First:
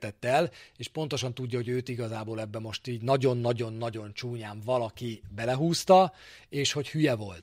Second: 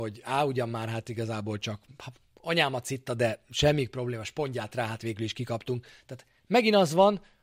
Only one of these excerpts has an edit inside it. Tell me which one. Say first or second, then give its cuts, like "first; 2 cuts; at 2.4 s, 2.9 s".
second; 1 cut; at 6.0 s